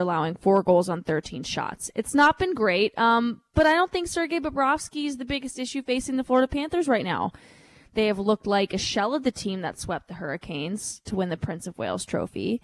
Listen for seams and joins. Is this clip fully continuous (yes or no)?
yes